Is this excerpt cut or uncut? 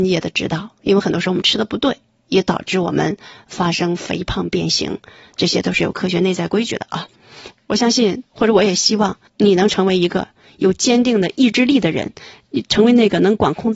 cut